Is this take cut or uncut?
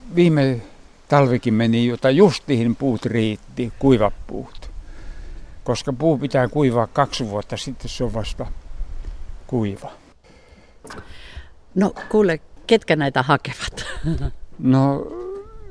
uncut